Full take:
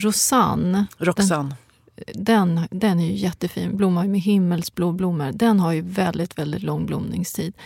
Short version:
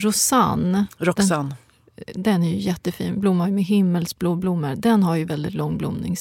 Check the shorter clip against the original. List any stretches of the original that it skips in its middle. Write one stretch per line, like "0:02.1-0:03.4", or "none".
0:02.1-0:02.7
0:05.8-0:06.3